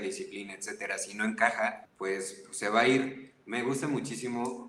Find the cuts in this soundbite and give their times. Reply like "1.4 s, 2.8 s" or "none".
1.8 s